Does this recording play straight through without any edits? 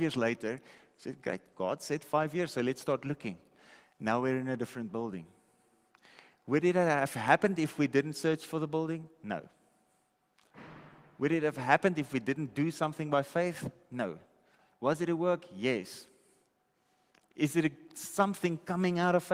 yes; 0 cuts

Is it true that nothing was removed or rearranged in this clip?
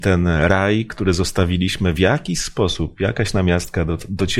yes; 0 cuts

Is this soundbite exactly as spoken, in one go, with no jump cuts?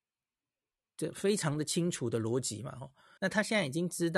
no; 1 cut; at 3.2 s

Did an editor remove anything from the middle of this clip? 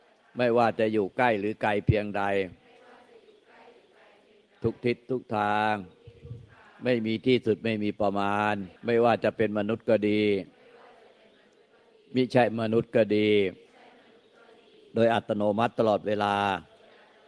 yes; 1 cut; at 8.8 s

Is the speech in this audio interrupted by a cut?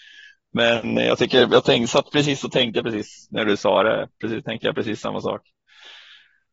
no; 0 cuts

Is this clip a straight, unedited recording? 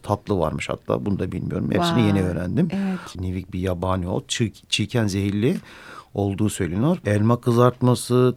no; 2 cuts; at 3.2 s, 7.0 s

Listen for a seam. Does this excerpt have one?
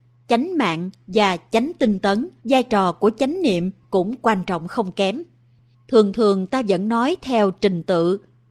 yes; 1 cut; at 2.4 s

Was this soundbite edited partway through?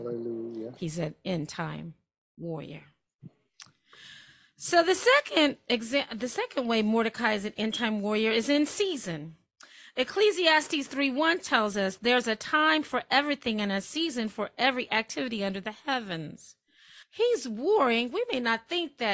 yes; 1 cut; at 17.0 s

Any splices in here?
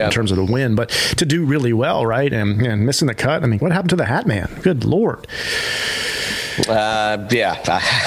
yes; 1 cut; at 3.6 s

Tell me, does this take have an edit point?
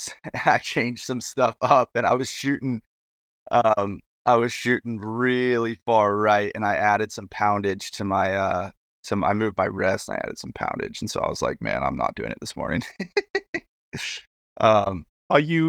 no; 0 cuts

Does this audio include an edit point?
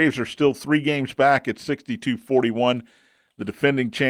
no; 0 cuts

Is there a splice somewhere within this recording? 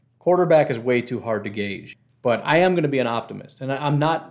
no; 0 cuts

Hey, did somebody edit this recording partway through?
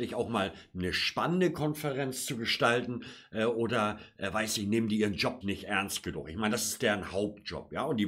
yes; 1 cut; at 5.4 s

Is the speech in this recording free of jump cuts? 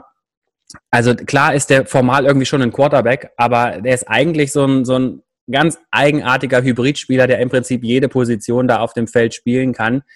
yes; 0 cuts

